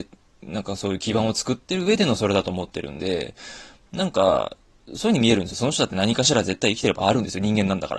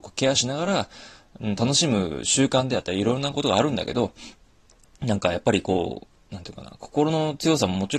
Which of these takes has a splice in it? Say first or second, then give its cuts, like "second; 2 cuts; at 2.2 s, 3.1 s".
first; 1 cut; at 5.5 s